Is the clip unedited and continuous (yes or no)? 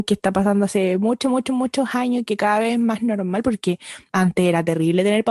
yes